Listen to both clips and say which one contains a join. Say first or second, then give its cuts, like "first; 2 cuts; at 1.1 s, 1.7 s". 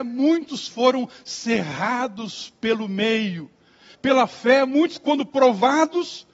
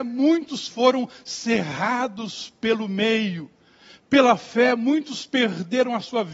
first; 1 cut; at 3.9 s